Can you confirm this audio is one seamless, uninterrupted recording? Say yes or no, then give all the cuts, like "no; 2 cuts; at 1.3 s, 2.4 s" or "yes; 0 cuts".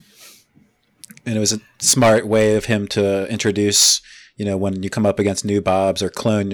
yes; 0 cuts